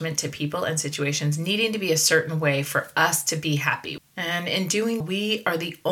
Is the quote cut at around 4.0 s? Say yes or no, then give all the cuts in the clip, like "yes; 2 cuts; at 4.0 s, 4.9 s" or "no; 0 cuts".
yes; 2 cuts; at 4.0 s, 5.0 s